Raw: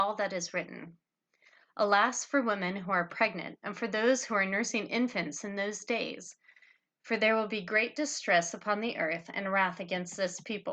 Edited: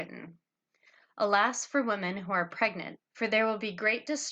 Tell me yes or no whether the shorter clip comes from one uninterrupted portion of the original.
no